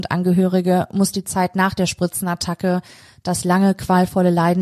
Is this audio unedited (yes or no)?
yes